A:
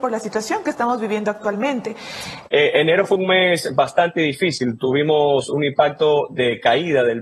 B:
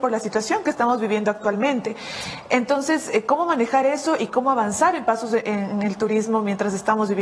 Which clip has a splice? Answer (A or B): A